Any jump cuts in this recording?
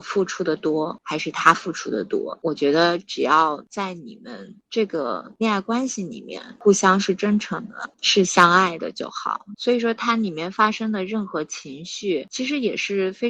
yes; 1 cut; at 9.5 s

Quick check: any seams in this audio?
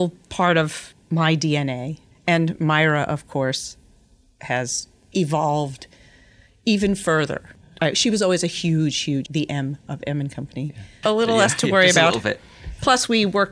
yes; 2 cuts; at 9.3 s, 11.0 s

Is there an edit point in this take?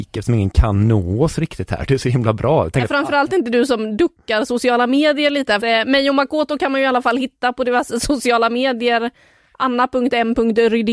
yes; 1 cut; at 5.6 s

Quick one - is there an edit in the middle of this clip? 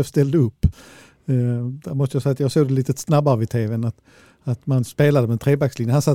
no; 0 cuts

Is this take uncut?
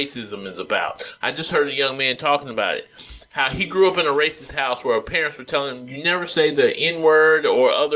yes; 0 cuts

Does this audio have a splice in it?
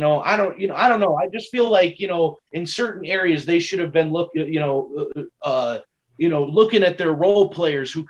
no; 0 cuts

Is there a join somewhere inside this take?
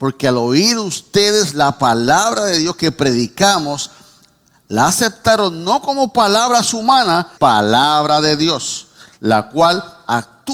yes; 1 cut; at 7.4 s

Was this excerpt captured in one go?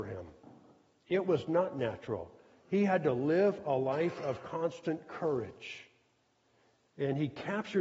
yes; 0 cuts

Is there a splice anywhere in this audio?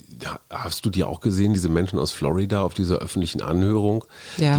no; 0 cuts

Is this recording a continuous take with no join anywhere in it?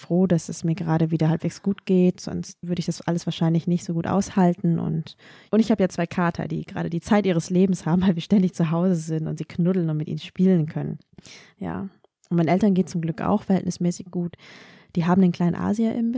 no; 1 cut; at 2.6 s

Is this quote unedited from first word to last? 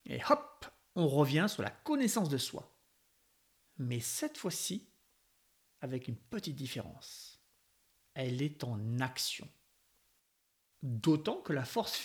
no; 1 cut; at 10.7 s

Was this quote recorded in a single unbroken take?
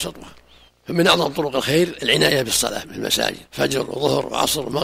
no; 1 cut; at 3.5 s

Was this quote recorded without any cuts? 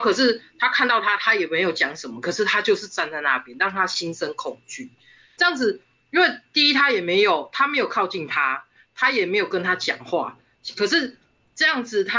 yes; 0 cuts

